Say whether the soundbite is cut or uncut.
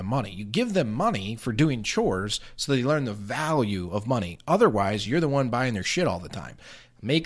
uncut